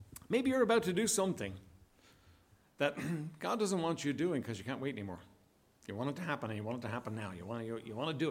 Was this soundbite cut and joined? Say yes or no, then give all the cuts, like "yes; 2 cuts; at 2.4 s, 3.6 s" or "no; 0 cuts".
no; 0 cuts